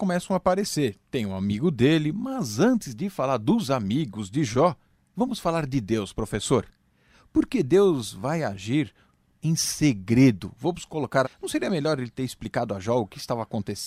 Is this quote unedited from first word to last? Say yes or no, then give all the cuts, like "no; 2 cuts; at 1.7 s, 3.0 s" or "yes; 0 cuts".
no; 1 cut; at 11.2 s